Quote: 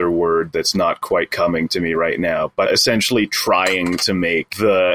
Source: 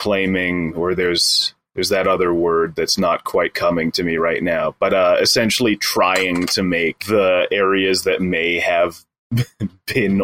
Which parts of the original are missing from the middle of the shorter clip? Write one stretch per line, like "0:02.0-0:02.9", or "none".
0:04.9-0:05.2